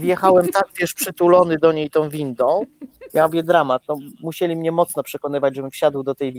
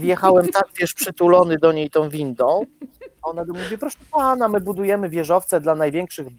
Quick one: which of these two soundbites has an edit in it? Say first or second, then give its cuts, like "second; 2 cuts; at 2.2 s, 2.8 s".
first; 1 cut; at 3.1 s